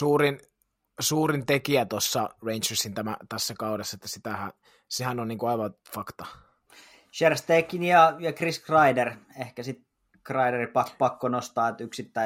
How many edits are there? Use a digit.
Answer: 0